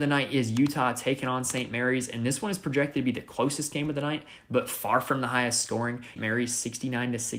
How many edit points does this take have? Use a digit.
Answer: 1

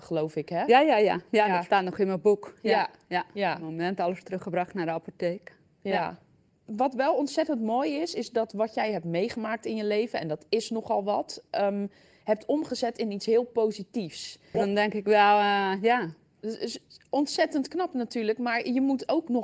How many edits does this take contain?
1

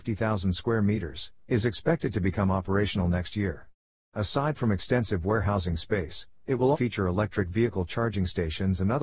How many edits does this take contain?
1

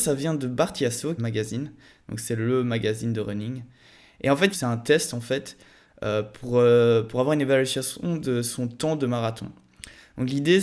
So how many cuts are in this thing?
2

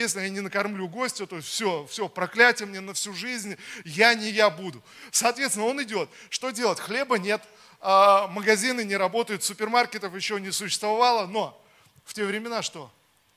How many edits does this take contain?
0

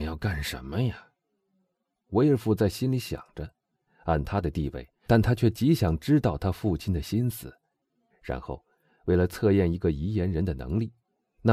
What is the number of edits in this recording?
2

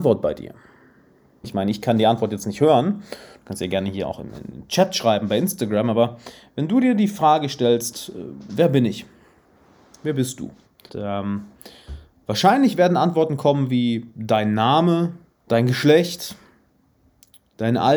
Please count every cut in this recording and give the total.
3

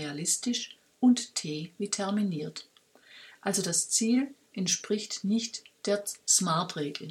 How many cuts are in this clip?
1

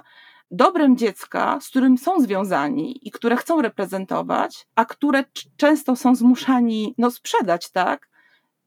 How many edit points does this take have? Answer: 1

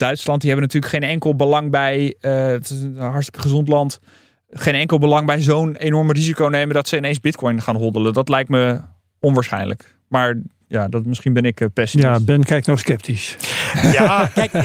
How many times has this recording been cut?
0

